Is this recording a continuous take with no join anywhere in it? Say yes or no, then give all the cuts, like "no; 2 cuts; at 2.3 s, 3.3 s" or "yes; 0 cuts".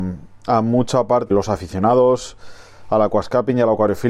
no; 1 cut; at 1.3 s